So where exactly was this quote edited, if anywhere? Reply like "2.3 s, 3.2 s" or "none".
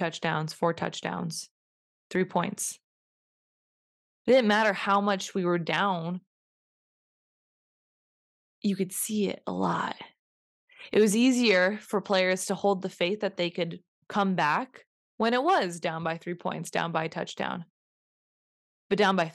none

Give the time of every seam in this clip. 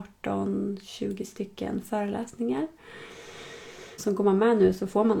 4.0 s

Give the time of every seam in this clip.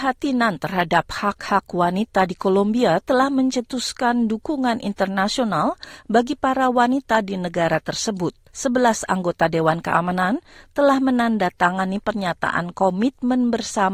8.5 s

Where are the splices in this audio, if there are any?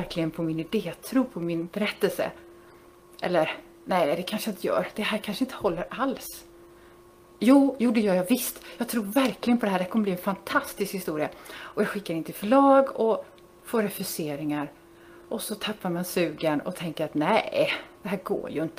none

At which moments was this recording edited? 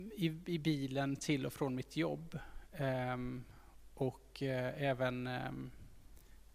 none

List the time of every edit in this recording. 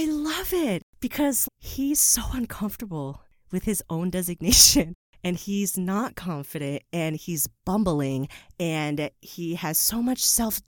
1.5 s

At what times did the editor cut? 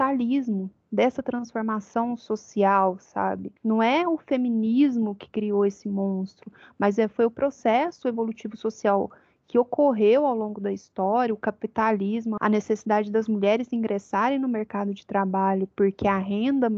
3.6 s, 12.4 s

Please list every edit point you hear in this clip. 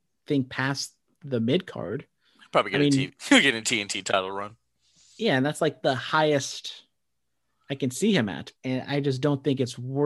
8.6 s

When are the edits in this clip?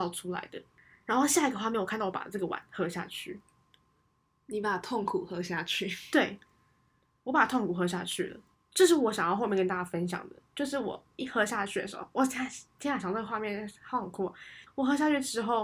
8.5 s, 14.7 s

